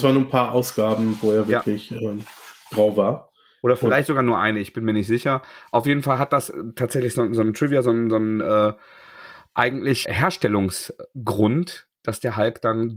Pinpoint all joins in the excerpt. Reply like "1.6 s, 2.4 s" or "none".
10.0 s